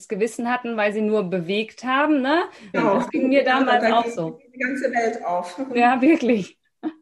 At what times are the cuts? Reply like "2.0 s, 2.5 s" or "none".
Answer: 2.7 s